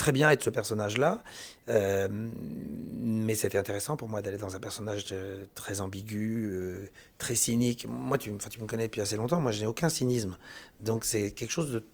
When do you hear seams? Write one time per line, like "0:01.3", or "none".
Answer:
none